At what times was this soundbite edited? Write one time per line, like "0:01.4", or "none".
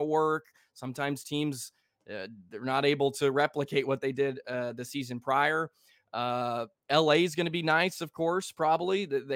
none